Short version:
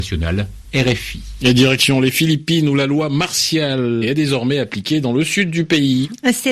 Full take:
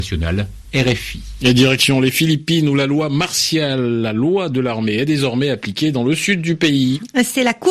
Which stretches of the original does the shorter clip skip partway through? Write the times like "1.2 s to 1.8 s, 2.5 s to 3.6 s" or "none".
4.0 s to 4.9 s